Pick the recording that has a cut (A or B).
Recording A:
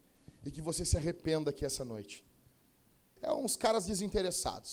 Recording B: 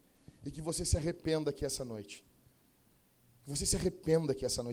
A